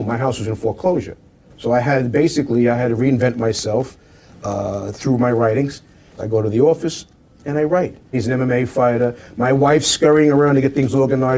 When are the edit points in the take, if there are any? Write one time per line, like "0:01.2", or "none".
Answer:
0:06.2
0:08.1